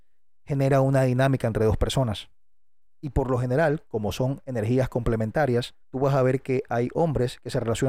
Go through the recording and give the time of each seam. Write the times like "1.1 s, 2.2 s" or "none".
5.8 s